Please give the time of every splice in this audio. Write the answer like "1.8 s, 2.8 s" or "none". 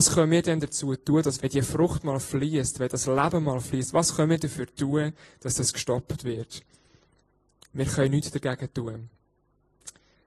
1.4 s